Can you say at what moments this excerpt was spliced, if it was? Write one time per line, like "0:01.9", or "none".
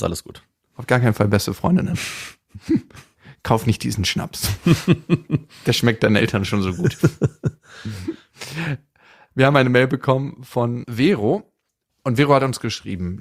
none